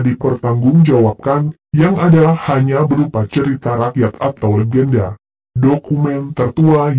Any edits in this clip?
no; 0 cuts

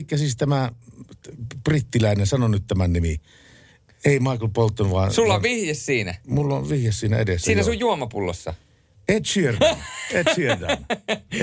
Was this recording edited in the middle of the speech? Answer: no; 0 cuts

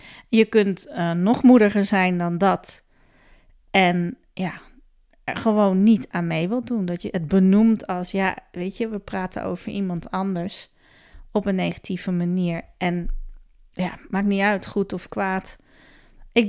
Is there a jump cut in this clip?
no; 0 cuts

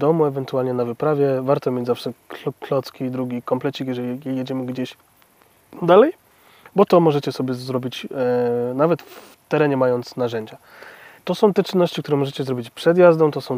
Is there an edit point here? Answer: yes; 1 cut; at 11.2 s

